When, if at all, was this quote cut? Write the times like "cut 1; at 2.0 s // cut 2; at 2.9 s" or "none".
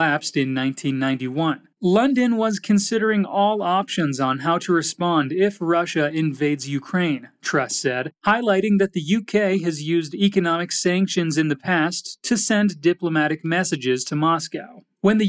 none

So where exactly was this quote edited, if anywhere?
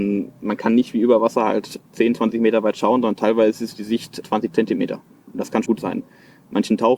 cut 1; at 4.2 s // cut 2; at 5.7 s

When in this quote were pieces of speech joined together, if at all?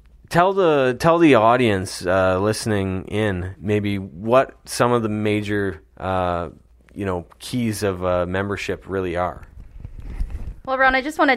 none

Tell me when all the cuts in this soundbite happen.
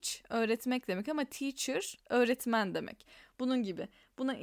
none

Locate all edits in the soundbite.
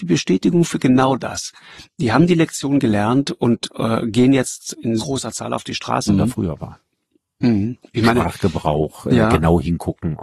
cut 1; at 5.0 s // cut 2; at 6.1 s

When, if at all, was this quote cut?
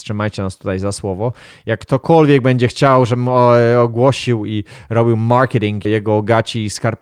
cut 1; at 5.8 s

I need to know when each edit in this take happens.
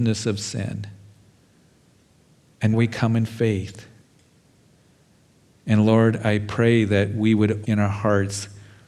cut 1; at 2.7 s // cut 2; at 5.5 s // cut 3; at 7.6 s

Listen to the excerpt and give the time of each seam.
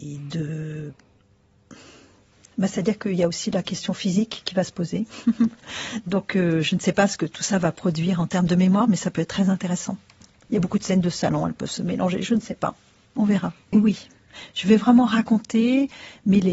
cut 1; at 13.7 s

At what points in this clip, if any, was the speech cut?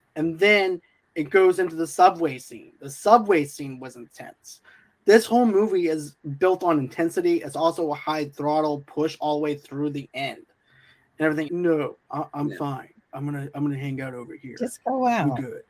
cut 1; at 11.5 s

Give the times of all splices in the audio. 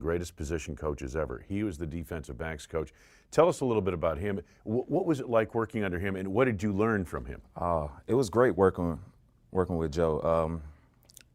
none

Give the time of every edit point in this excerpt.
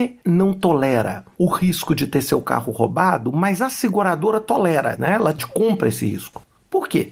none

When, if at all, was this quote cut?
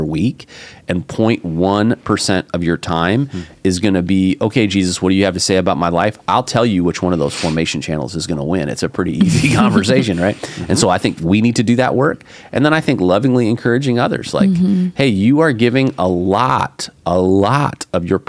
none

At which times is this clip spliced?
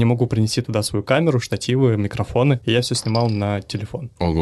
none

